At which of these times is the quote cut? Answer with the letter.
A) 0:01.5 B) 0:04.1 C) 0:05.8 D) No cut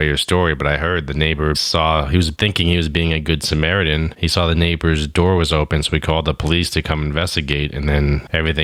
A